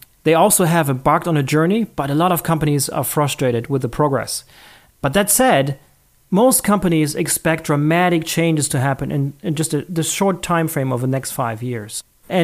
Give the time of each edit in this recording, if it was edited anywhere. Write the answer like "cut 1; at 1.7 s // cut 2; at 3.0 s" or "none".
cut 1; at 6.2 s